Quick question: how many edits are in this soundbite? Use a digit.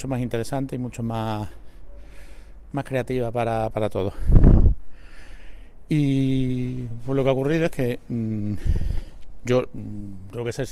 0